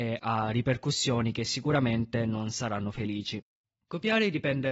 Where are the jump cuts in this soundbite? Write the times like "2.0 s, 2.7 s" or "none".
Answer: none